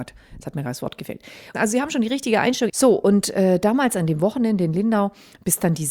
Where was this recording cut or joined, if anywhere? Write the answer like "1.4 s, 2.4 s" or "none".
1.5 s, 2.7 s